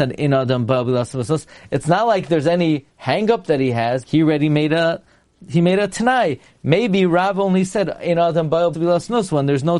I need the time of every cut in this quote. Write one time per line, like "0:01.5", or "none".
0:04.0
0:08.7